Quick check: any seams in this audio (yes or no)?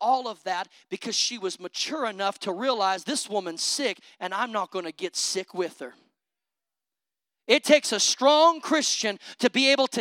no